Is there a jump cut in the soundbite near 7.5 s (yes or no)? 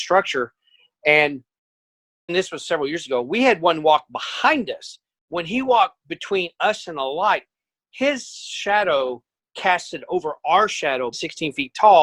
no